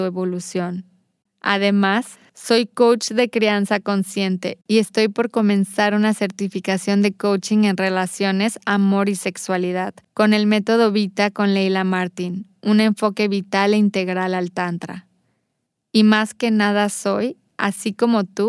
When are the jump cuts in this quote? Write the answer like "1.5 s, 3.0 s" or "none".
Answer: 1.3 s